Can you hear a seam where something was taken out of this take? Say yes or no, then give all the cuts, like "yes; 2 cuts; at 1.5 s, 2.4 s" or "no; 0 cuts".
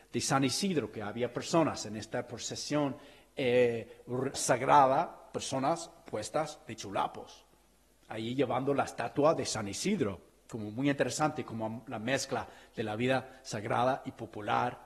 yes; 1 cut; at 4.3 s